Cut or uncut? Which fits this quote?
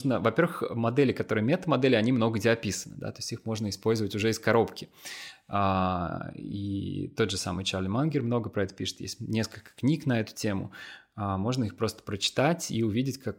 uncut